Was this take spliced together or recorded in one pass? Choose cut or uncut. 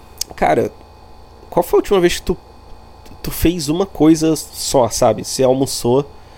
uncut